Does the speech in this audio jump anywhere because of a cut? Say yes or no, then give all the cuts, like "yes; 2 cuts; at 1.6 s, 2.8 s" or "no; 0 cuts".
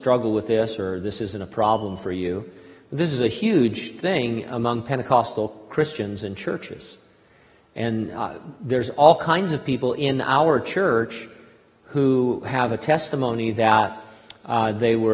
no; 0 cuts